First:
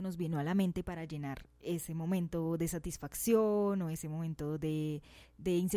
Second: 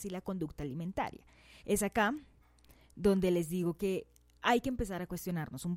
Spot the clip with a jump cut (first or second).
second